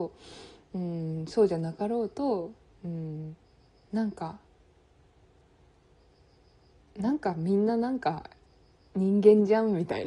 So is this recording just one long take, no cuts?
yes; 0 cuts

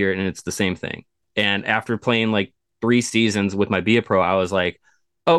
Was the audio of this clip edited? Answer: no; 0 cuts

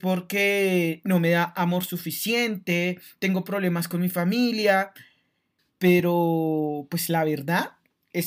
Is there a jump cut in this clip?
yes; 1 cut; at 5.6 s

